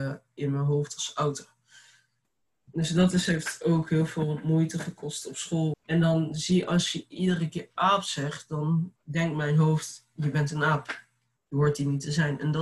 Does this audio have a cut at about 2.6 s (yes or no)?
no